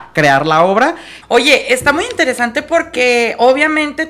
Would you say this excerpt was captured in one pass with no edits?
no; 1 cut; at 1.2 s

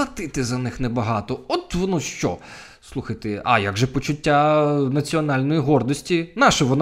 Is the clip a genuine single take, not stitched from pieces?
yes; 0 cuts

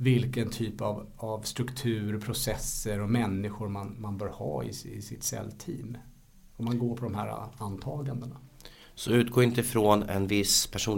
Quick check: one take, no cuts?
yes; 0 cuts

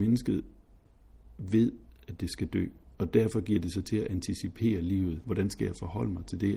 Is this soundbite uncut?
no; 1 cut; at 5.2 s

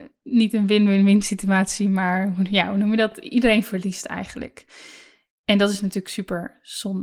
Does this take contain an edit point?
no; 0 cuts

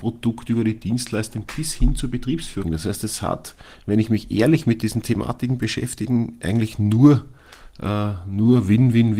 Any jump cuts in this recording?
yes; 1 cut; at 2.6 s

